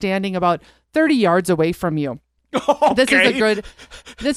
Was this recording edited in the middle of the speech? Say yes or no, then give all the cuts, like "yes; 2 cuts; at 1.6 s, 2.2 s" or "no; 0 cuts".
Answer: no; 0 cuts